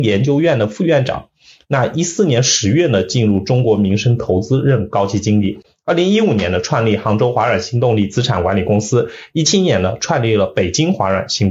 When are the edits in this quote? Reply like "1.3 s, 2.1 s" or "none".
none